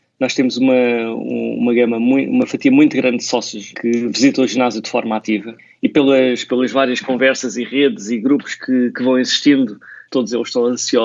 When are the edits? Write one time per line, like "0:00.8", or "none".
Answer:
0:03.7